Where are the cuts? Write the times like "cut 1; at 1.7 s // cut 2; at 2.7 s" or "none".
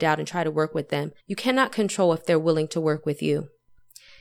cut 1; at 1.2 s